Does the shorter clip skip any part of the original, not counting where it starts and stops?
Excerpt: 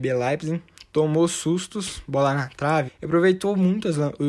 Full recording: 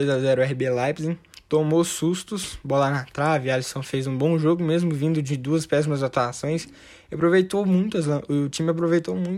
yes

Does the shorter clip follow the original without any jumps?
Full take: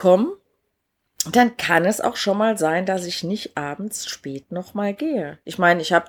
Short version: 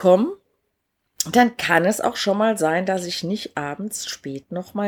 yes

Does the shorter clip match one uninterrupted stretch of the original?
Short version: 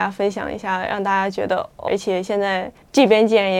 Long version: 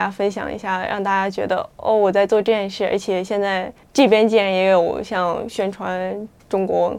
no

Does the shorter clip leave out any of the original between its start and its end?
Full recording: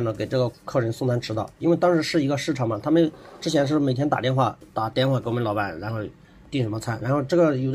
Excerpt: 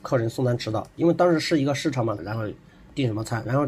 yes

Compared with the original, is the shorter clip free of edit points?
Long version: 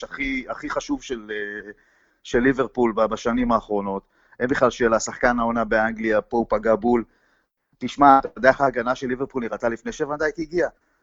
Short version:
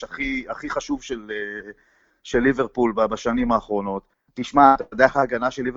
no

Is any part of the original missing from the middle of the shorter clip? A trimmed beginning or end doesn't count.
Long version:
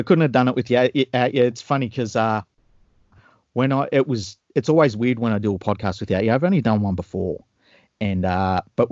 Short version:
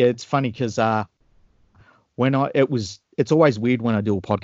no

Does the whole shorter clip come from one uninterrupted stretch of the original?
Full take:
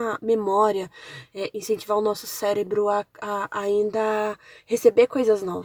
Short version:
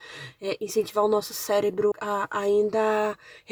no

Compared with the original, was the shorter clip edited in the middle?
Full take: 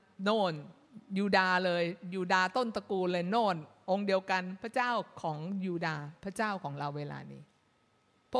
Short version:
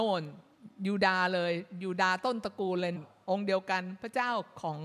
yes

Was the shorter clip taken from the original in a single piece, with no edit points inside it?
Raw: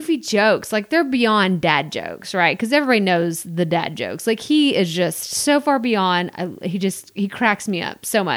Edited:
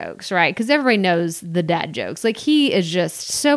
yes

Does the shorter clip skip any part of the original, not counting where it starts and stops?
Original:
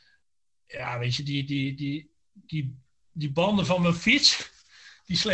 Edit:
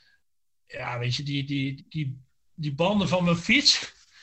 yes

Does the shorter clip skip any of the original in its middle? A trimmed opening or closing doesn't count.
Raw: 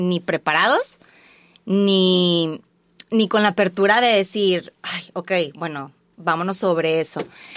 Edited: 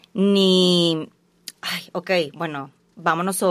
yes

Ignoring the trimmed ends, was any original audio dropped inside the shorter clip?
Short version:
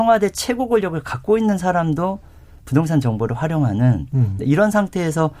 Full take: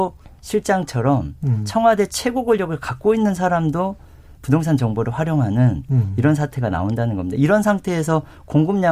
yes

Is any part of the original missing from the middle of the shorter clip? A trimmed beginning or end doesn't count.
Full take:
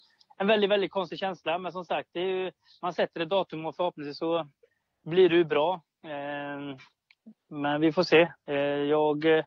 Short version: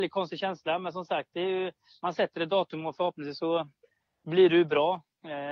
no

